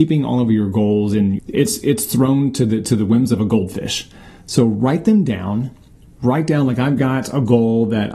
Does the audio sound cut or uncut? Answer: cut